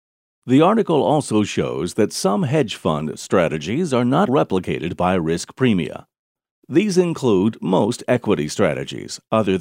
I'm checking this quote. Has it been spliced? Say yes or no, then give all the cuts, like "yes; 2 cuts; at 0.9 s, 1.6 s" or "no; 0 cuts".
yes; 1 cut; at 4.3 s